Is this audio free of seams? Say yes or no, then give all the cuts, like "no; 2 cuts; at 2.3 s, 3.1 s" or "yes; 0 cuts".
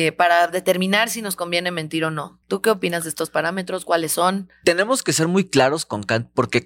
yes; 0 cuts